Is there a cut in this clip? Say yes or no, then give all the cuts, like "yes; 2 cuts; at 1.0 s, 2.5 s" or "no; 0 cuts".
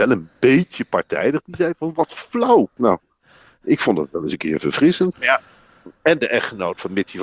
yes; 2 cuts; at 2.8 s, 5.1 s